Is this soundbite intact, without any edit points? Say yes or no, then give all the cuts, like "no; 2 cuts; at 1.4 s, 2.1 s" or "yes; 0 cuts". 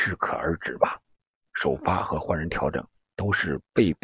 no; 1 cut; at 1.4 s